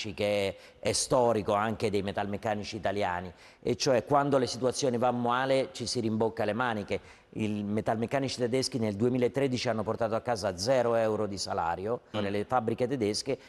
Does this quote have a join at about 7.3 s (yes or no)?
no